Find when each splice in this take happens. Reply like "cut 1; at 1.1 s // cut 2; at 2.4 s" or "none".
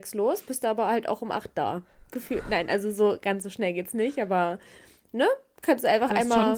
none